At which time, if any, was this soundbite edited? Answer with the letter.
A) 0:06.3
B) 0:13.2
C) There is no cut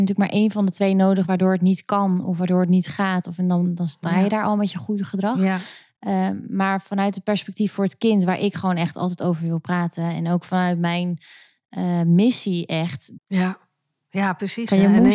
B